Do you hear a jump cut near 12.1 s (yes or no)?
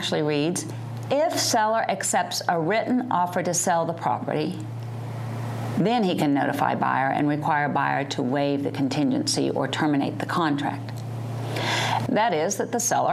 yes